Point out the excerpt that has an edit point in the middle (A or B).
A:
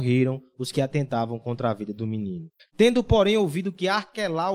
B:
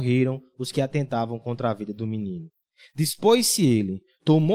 A